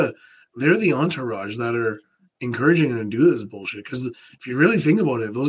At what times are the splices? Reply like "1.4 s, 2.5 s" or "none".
none